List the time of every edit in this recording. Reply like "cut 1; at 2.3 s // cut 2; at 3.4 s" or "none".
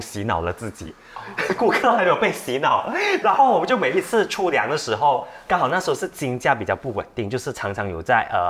cut 1; at 3.2 s

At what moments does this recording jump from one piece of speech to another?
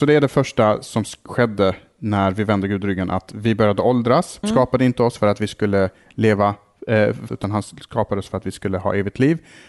cut 1; at 4.4 s // cut 2; at 7.3 s

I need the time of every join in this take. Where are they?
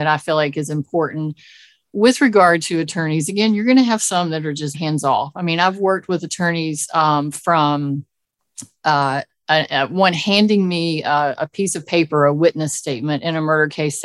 cut 1; at 4.7 s

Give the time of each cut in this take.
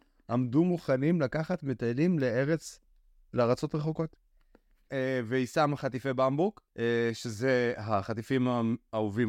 cut 1; at 4.9 s // cut 2; at 6.7 s

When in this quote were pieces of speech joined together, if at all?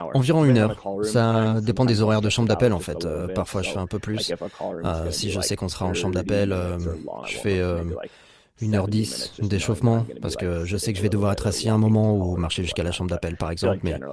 cut 1; at 7.2 s

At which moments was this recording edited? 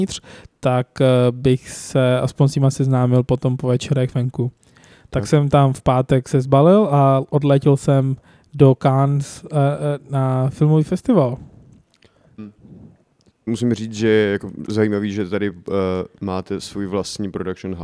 cut 1; at 12.4 s // cut 2; at 13.5 s

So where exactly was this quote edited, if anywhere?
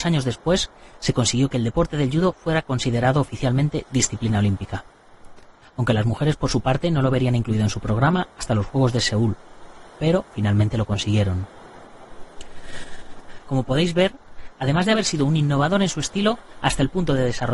cut 1; at 13.4 s

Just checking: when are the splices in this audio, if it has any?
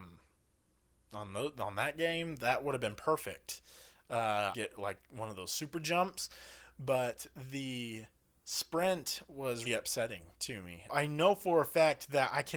cut 1; at 4.5 s // cut 2; at 9.7 s // cut 3; at 10.9 s

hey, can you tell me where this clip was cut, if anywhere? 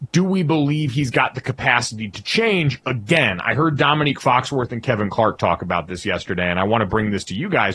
none

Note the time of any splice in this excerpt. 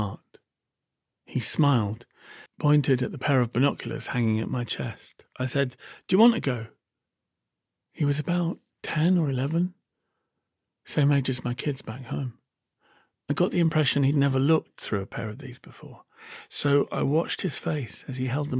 cut 1; at 2.5 s

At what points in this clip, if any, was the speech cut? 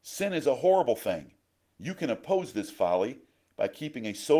cut 1; at 1.7 s

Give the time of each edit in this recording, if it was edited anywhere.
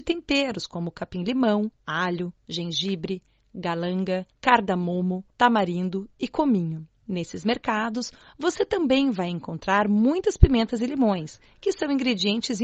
cut 1; at 1.8 s

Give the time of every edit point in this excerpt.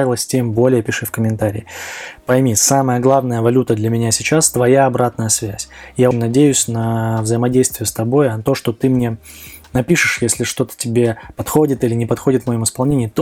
cut 1; at 6.1 s // cut 2; at 8.5 s

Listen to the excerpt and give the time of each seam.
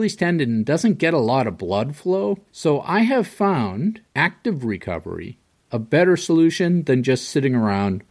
cut 1; at 2.5 s // cut 2; at 4.1 s

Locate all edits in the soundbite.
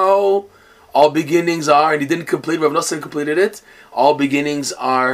none

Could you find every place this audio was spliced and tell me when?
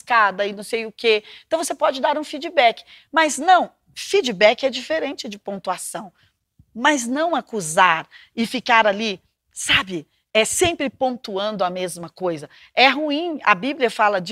none

